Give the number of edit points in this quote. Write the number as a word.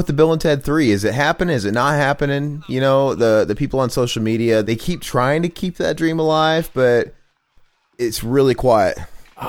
one